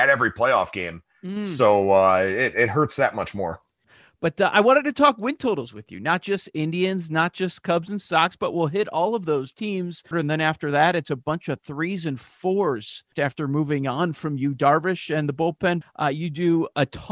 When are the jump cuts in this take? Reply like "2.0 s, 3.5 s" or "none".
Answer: 10.1 s, 15.8 s